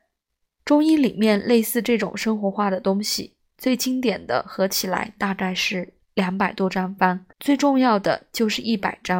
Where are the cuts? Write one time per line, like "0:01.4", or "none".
0:06.0
0:07.3